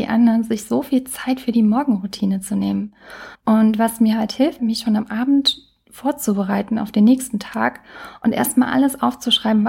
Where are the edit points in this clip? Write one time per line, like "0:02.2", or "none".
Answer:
0:03.3
0:04.6